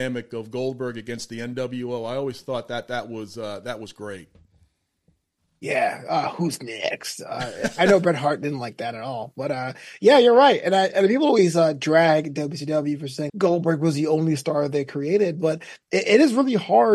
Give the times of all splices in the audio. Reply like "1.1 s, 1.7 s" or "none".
13.3 s